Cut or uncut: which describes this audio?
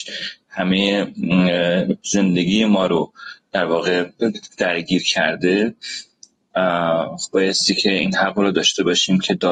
uncut